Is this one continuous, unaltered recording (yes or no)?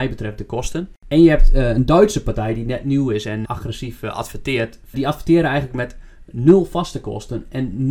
no